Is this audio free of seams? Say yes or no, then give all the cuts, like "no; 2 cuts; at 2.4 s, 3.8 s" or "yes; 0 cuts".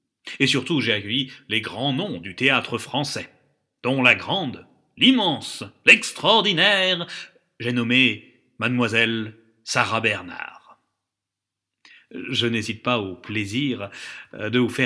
yes; 0 cuts